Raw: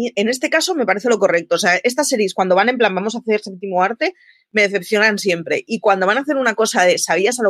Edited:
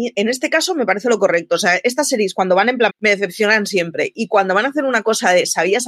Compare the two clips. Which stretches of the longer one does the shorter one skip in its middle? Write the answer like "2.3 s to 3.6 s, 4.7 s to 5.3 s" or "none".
2.9 s to 4.4 s